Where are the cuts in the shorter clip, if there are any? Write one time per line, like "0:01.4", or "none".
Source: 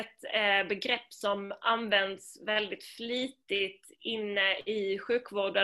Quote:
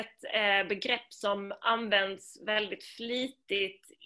none